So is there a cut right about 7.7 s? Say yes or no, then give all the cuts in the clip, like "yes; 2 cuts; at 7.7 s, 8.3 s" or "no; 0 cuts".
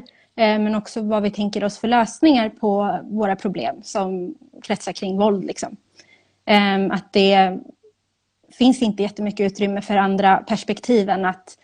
no; 0 cuts